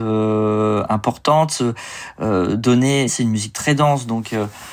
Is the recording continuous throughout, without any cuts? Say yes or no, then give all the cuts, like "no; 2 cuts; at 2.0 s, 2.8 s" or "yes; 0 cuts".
no; 1 cut; at 3.1 s